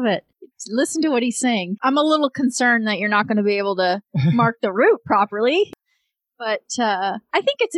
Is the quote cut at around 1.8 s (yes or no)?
yes